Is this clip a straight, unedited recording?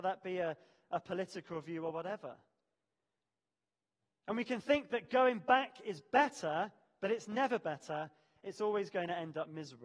yes; 0 cuts

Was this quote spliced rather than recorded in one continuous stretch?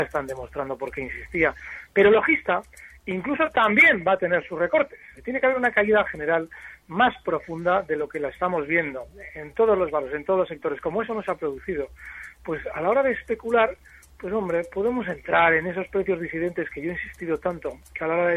yes; 1 cut; at 5.1 s

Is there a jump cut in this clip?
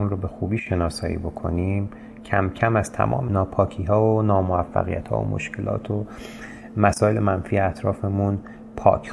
no; 0 cuts

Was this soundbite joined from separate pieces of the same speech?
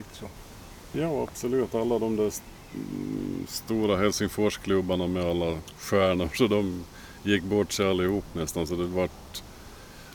yes; 1 cut; at 0.9 s

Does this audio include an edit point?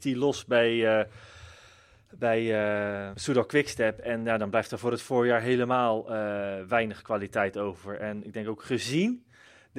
yes; 1 cut; at 3.1 s

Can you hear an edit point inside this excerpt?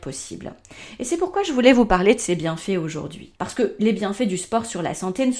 yes; 1 cut; at 3.4 s

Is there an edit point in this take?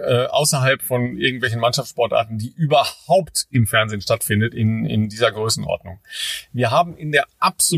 no; 0 cuts

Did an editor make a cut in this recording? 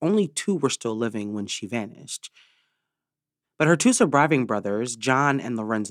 yes; 1 cut; at 3.4 s

